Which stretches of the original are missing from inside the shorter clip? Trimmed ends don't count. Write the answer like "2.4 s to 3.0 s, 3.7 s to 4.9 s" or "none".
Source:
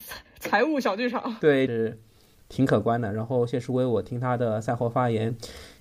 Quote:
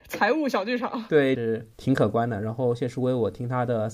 2.0 s to 2.4 s